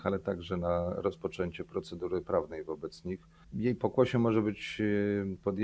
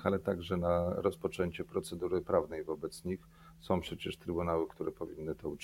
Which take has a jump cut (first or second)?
first